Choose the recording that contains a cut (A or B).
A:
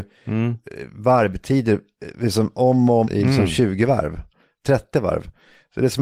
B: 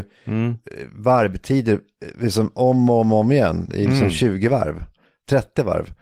A